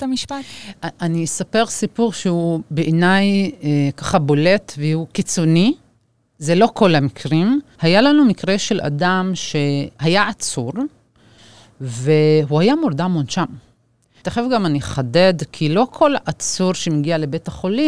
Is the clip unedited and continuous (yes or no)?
no